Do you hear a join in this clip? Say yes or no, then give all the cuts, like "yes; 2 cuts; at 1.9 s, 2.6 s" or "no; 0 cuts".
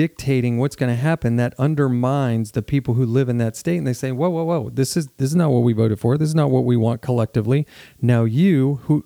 no; 0 cuts